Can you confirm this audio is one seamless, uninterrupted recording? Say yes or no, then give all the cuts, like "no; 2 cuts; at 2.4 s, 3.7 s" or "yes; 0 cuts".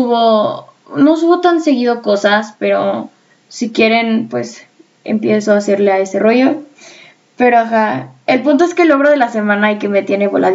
yes; 0 cuts